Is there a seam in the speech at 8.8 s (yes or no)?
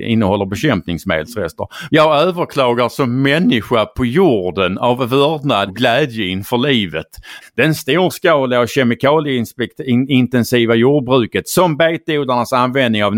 no